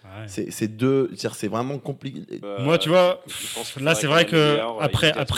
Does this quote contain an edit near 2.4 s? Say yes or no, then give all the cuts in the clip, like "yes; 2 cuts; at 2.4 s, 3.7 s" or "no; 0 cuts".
yes; 1 cut; at 2.4 s